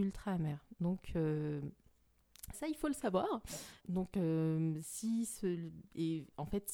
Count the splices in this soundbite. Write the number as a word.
two